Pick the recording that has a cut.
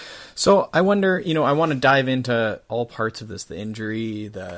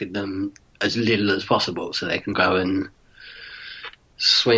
second; 1 cut; at 2.3 s

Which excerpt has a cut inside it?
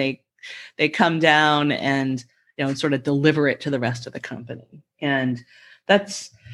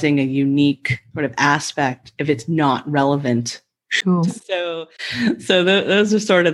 second; 1 cut; at 4.3 s

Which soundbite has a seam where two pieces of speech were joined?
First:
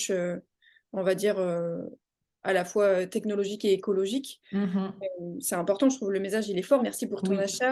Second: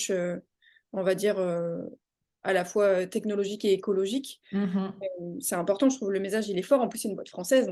first; 1 cut; at 6.8 s

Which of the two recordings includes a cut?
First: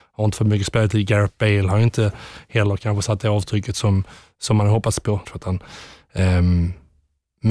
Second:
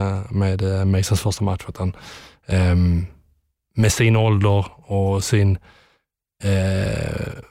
first; 1 cut; at 5.2 s

